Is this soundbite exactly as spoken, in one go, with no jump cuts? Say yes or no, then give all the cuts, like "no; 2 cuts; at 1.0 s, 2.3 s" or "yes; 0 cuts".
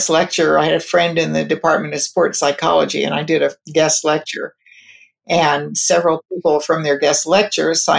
yes; 0 cuts